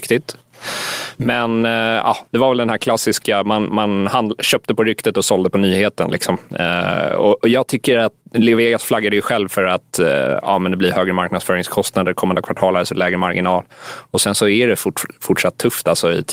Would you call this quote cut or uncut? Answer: uncut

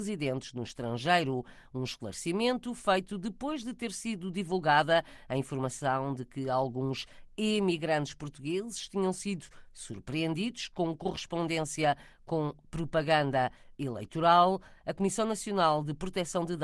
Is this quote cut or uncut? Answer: uncut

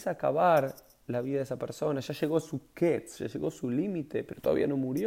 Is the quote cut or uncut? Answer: uncut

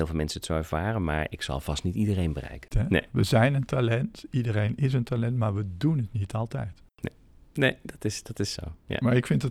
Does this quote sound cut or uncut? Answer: cut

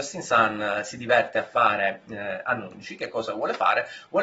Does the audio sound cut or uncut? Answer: uncut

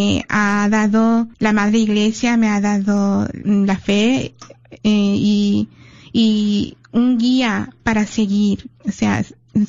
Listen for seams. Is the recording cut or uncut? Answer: cut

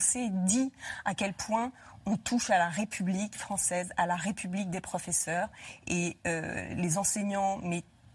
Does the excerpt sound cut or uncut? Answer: uncut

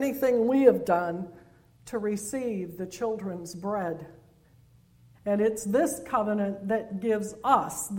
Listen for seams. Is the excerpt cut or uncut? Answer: cut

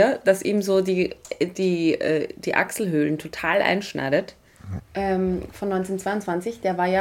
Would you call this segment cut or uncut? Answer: cut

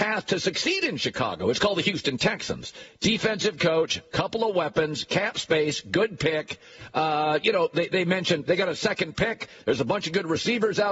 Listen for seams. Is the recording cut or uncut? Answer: uncut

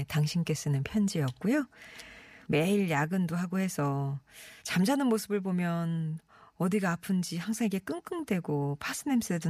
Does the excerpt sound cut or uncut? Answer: cut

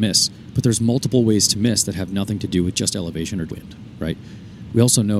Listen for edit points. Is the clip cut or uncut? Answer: cut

